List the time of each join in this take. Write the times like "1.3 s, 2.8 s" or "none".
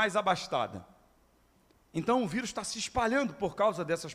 1.7 s